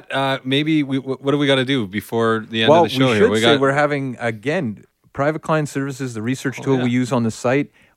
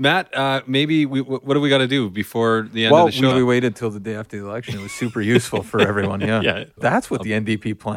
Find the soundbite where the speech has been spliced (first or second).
second